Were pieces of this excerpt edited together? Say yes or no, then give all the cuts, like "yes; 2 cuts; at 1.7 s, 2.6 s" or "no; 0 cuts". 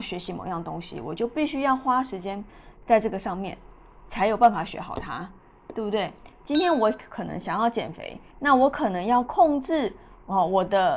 no; 0 cuts